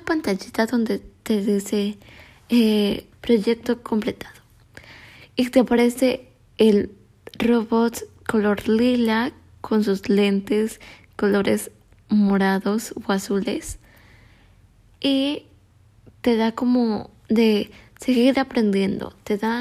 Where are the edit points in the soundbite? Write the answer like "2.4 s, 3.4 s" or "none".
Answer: 3.1 s